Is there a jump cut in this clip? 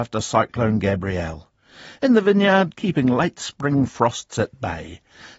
yes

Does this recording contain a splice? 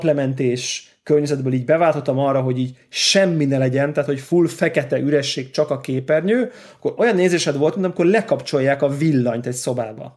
no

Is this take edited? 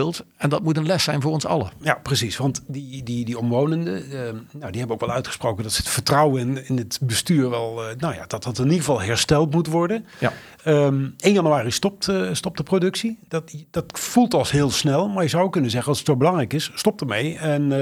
no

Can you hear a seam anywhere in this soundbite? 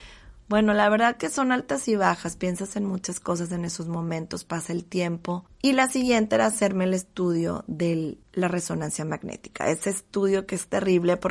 no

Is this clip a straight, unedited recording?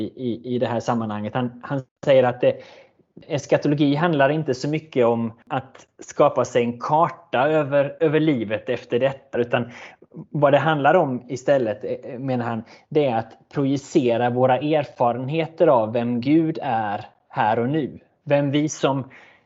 no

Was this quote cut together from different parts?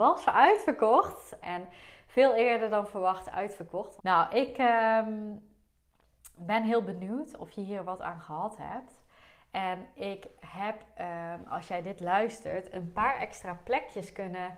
yes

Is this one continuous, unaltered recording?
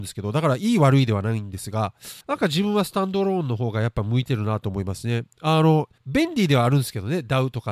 no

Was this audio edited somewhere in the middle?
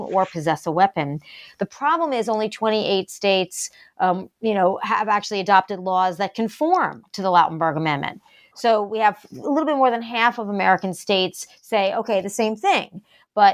no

